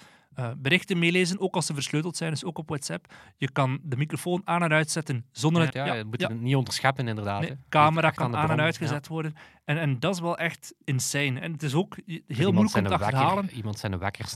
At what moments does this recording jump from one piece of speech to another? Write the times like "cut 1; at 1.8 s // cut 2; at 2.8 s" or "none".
cut 1; at 5.7 s